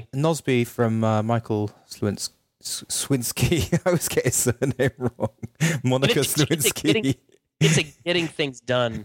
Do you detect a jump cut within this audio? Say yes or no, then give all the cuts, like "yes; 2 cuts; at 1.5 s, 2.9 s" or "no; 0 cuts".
no; 0 cuts